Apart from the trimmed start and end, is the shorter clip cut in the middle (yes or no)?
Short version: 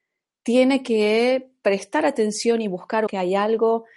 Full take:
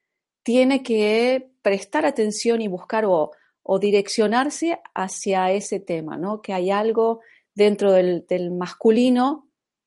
yes